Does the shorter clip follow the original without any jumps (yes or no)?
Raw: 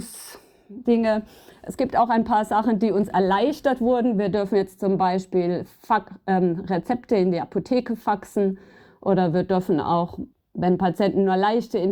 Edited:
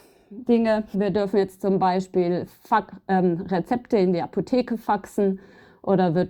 no